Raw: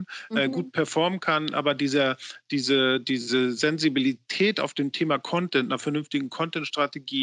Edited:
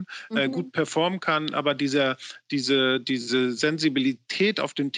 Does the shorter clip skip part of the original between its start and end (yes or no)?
no